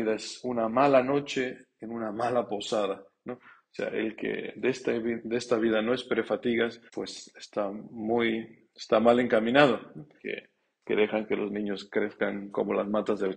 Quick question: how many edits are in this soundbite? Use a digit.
2